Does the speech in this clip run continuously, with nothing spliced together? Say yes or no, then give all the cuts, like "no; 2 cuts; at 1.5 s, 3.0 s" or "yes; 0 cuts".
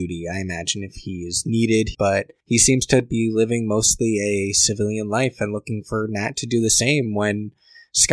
no; 1 cut; at 1.9 s